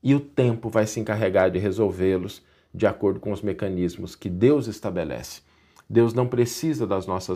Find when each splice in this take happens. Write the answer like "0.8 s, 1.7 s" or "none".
none